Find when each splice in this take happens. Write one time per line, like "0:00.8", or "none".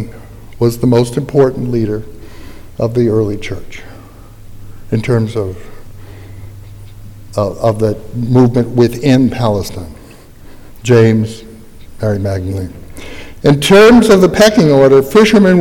none